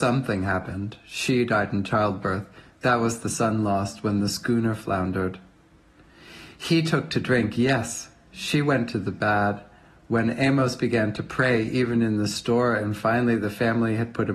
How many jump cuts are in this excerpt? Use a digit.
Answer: 0